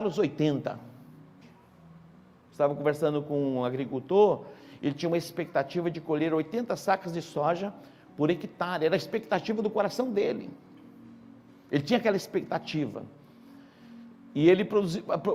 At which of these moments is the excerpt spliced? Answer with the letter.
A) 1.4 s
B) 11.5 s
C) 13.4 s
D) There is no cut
A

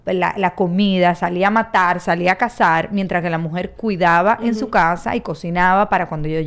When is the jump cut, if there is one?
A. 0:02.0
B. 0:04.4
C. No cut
C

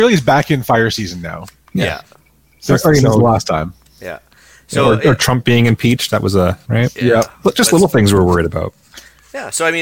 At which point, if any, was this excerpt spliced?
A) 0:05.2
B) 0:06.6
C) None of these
B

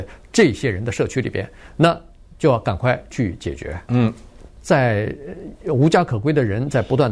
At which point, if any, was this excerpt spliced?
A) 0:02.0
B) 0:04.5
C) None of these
B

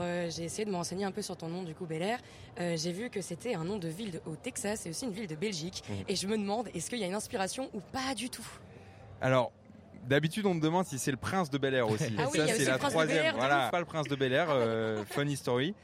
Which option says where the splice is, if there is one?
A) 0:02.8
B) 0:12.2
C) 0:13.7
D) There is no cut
C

